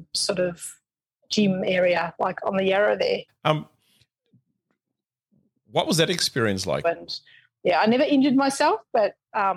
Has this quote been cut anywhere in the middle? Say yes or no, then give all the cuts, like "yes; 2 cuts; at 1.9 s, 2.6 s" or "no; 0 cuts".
yes; 2 cuts; at 3.3 s, 6.8 s